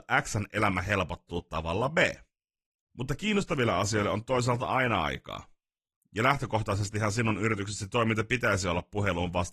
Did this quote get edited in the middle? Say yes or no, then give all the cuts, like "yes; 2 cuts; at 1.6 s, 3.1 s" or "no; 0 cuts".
yes; 1 cut; at 2.9 s